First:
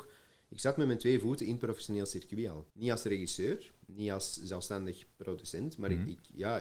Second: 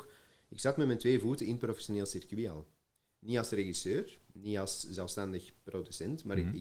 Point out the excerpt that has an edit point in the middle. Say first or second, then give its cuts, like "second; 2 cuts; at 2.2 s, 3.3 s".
first; 1 cut; at 2.7 s